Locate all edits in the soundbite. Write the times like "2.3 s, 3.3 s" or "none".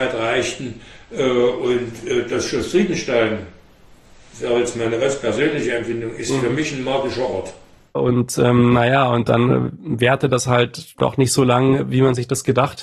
none

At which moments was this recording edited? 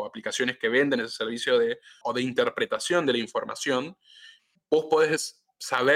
2.0 s, 4.6 s

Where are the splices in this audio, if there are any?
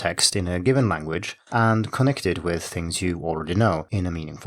1.5 s

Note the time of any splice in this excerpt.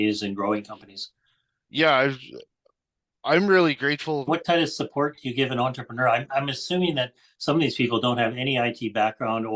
4.3 s

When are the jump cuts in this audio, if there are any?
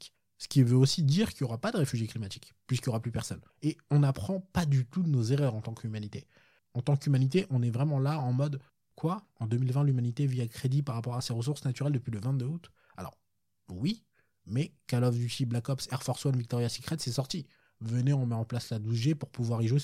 3.5 s

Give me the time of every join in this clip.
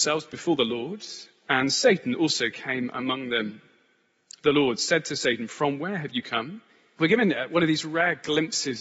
7.0 s

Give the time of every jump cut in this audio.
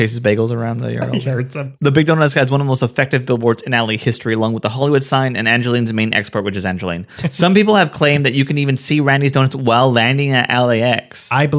none

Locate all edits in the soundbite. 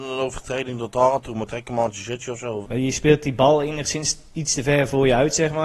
2.6 s

